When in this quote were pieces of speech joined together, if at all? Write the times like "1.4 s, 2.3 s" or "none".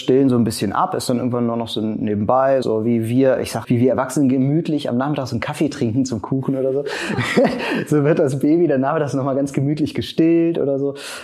2.6 s, 3.6 s